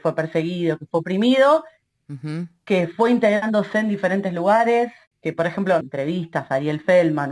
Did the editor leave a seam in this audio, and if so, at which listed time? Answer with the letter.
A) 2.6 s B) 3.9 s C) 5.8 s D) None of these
C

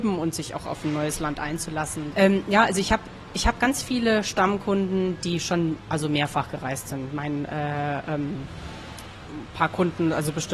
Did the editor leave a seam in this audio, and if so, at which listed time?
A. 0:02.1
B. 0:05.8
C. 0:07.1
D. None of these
A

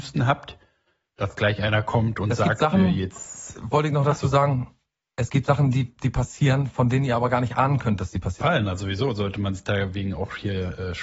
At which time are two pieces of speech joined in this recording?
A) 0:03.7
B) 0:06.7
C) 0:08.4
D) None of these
C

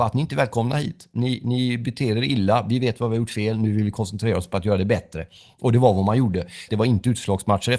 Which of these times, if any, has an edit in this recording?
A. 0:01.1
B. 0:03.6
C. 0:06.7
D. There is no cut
C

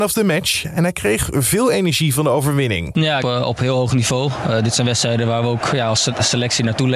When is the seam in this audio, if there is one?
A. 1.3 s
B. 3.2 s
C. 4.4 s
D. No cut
B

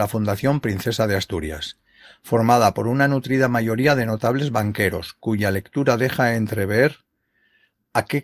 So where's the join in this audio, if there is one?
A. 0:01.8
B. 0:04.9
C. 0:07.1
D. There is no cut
D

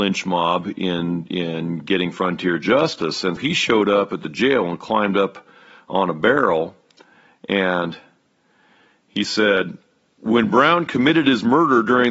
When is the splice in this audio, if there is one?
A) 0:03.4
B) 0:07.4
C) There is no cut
A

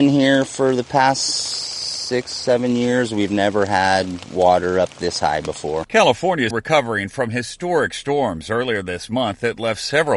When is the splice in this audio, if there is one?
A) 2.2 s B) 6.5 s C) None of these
B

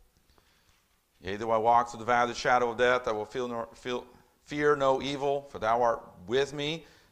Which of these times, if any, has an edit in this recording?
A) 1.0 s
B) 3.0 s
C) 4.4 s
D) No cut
D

